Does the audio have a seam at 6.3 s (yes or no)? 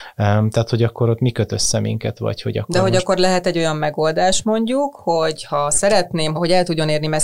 yes